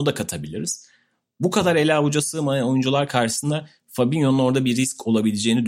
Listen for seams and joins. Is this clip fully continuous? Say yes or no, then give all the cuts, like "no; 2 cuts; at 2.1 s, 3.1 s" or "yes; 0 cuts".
yes; 0 cuts